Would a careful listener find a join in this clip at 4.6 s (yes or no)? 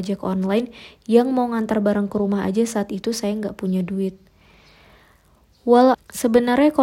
no